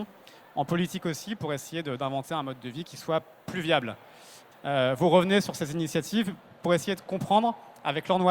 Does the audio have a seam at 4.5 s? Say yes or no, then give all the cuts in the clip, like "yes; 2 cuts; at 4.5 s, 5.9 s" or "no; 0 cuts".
yes; 1 cut; at 4.5 s